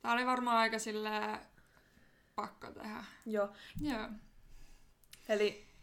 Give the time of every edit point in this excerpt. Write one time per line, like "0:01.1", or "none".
0:03.7